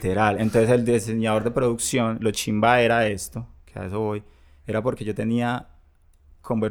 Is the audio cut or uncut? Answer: uncut